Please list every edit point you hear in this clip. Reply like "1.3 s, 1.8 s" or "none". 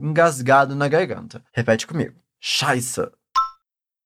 1.5 s